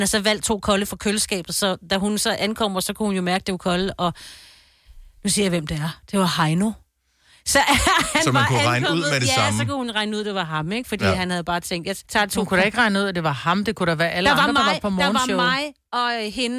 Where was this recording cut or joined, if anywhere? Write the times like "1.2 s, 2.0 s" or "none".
12.0 s